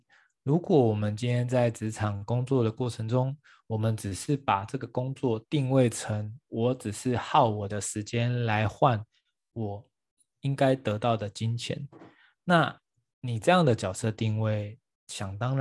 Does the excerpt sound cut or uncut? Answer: uncut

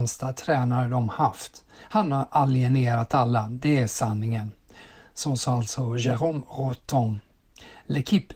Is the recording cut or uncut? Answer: uncut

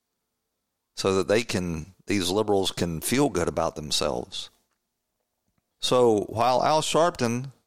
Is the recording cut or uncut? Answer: cut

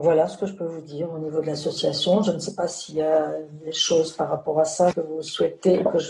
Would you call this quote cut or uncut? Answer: cut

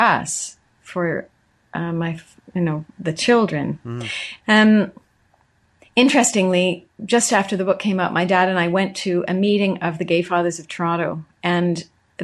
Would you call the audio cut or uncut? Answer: cut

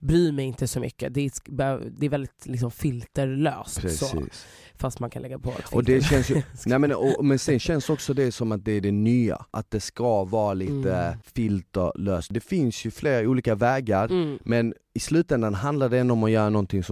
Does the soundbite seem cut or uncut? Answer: uncut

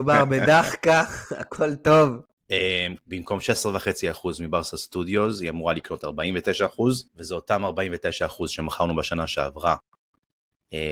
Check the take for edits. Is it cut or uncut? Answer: cut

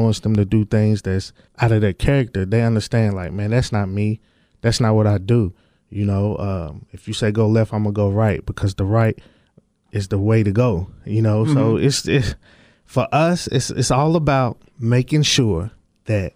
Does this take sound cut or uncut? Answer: uncut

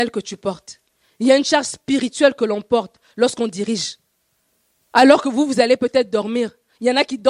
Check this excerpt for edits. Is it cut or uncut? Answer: uncut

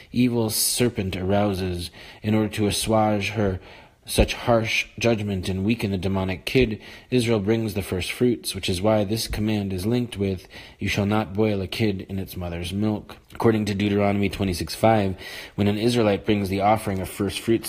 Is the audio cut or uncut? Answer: cut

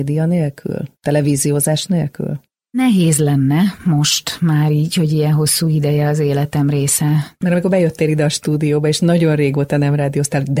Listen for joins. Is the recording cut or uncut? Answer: uncut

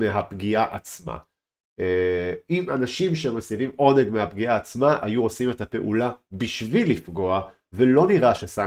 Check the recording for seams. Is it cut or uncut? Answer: uncut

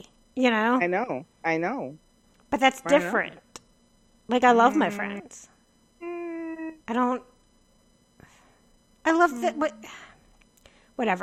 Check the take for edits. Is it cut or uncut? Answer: cut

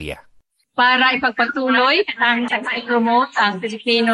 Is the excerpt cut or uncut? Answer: cut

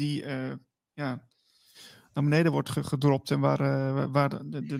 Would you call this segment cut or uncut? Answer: uncut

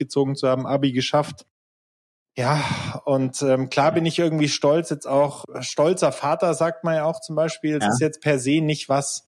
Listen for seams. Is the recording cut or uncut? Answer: cut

